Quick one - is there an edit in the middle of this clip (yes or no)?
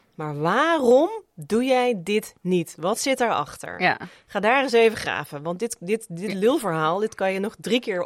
no